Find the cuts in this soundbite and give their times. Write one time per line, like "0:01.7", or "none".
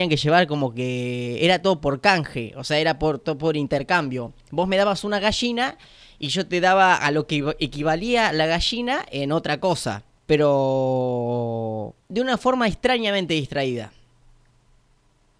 0:10.2
0:12.0